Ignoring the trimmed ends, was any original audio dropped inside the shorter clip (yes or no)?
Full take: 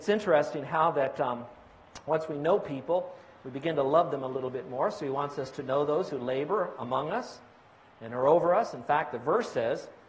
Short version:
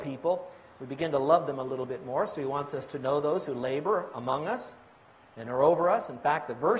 no